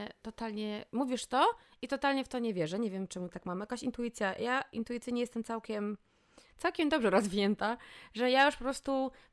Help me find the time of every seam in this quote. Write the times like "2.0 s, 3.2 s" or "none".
none

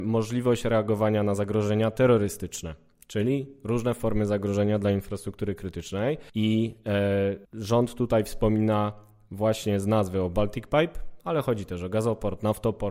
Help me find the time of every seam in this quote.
6.3 s, 7.5 s

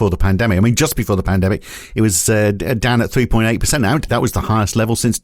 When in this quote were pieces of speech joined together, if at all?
4.1 s

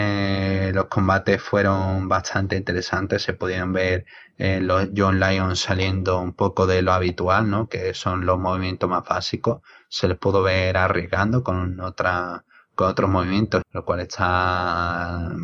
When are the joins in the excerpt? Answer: 13.6 s

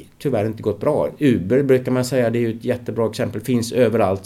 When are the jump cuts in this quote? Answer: none

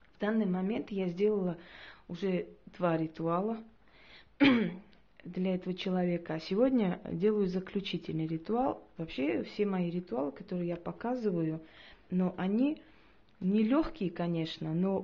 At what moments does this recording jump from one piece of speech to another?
9.0 s, 12.1 s

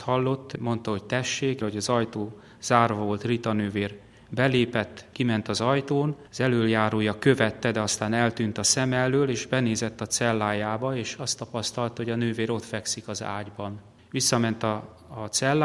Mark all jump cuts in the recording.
1.6 s, 5.1 s

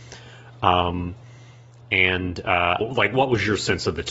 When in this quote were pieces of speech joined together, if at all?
2.8 s

